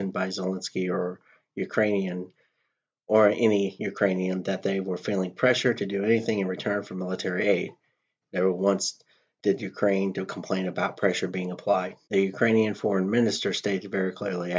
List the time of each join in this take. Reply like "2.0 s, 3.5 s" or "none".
8.2 s, 12.1 s